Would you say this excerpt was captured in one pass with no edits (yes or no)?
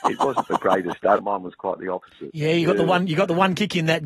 no